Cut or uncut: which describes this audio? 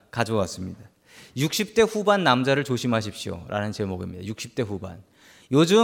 uncut